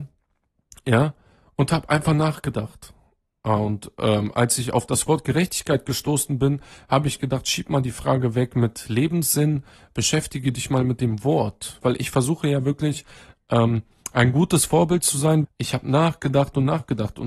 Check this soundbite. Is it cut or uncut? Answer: cut